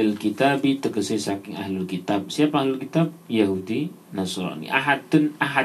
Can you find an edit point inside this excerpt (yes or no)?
no